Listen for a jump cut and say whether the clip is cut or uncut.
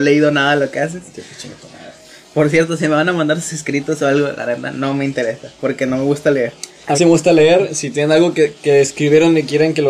cut